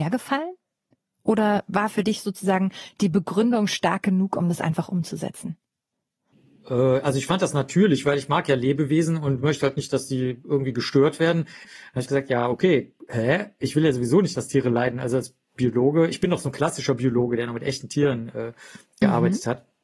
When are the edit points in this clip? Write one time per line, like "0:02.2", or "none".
0:11.6